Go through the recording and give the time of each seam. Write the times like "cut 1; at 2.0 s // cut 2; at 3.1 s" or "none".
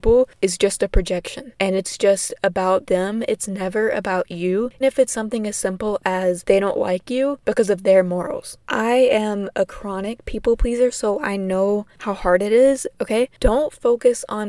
cut 1; at 4.8 s // cut 2; at 8.6 s // cut 3; at 13.0 s